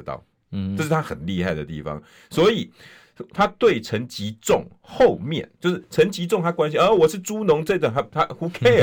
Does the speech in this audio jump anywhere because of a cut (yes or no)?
no